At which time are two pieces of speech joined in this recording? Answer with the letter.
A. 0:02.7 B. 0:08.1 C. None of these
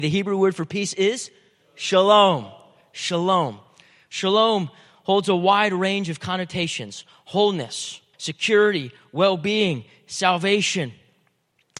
B